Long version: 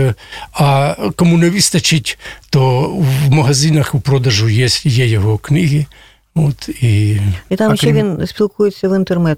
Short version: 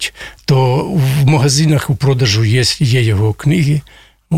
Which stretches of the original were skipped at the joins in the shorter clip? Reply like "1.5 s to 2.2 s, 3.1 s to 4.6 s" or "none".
none